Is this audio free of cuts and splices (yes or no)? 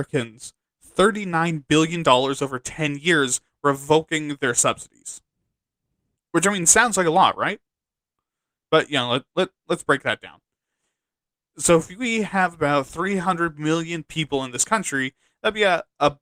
yes